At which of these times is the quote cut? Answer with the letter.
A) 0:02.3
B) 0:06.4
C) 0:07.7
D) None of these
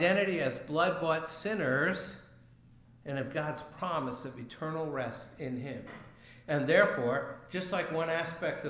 B